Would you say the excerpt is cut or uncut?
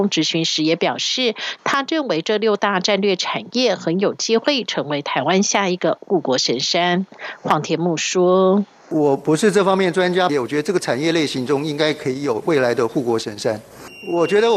cut